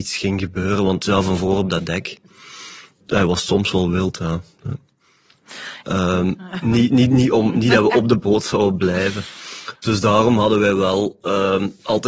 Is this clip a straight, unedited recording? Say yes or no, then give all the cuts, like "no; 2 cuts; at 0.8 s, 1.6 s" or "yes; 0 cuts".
no; 1 cut; at 5.8 s